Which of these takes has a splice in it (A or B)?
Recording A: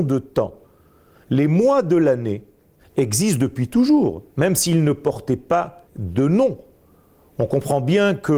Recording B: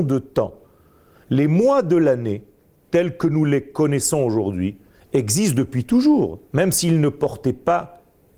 A